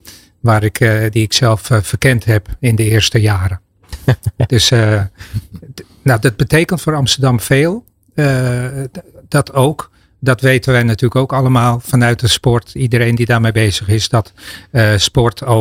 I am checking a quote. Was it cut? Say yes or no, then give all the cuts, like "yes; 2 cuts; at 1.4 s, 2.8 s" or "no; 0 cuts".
no; 0 cuts